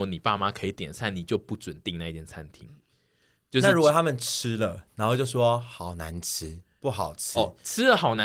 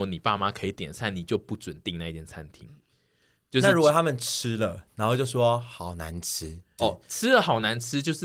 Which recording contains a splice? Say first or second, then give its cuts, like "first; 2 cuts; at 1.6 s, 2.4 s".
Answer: second; 1 cut; at 6.8 s